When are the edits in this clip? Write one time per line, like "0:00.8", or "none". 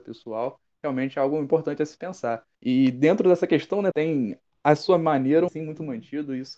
0:02.5
0:03.9
0:05.5